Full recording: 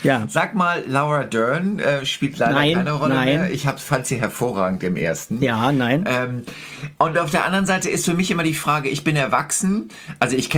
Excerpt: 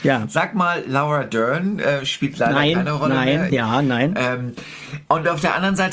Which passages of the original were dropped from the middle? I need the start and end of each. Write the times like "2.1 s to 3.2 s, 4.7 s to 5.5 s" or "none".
3.5 s to 5.4 s

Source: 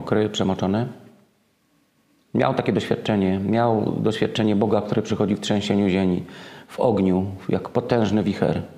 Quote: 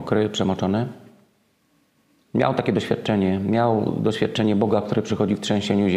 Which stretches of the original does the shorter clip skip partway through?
none

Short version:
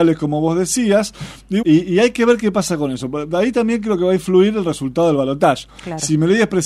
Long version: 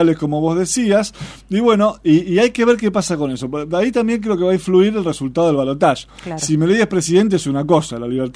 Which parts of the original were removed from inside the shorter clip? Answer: 1.6 s to 2.0 s

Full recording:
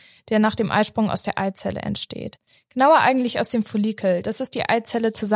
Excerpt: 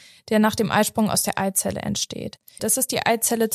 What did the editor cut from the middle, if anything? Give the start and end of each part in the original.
2.6 s to 4.2 s

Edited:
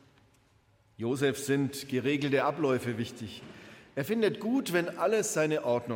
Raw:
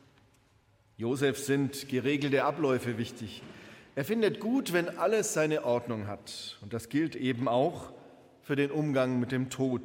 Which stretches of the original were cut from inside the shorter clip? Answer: none

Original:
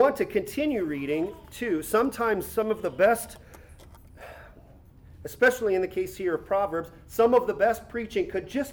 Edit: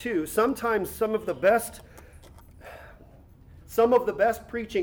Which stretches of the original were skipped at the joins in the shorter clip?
5.2 s to 7.0 s

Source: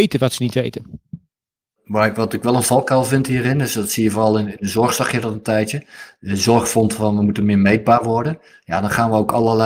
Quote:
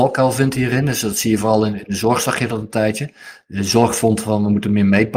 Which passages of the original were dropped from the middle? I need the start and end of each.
none

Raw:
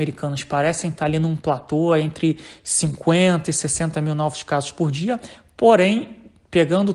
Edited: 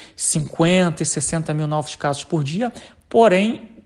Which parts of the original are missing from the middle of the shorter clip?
none

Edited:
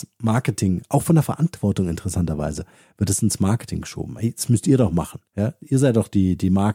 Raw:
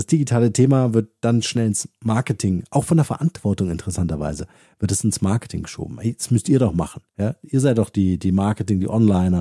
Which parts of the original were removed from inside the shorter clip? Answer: none

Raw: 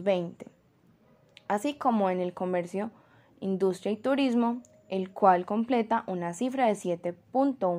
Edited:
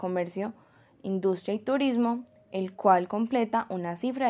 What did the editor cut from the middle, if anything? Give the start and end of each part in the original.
none

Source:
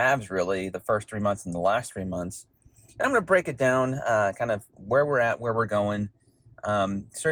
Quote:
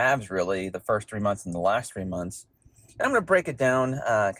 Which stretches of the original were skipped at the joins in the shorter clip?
none

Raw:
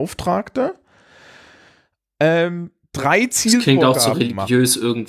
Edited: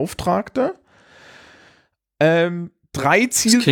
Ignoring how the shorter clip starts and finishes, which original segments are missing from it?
none

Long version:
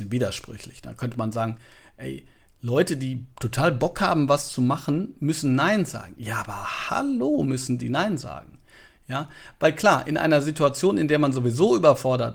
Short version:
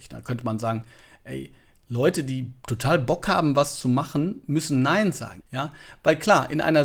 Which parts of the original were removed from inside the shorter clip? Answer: 6.1 s to 9.0 s

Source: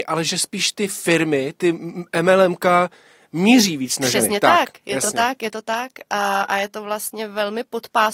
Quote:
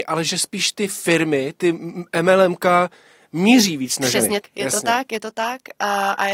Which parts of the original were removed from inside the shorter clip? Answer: 4.4 s to 4.7 s

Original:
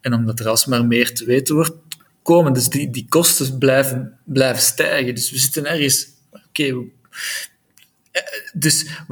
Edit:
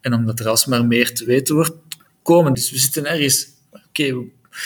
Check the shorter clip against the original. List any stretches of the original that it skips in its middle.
2.5 s to 5.1 s

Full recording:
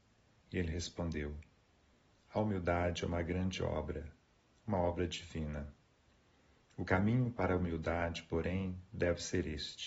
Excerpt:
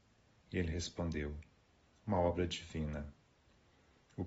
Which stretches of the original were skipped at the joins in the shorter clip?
1.9 s to 4.5 s

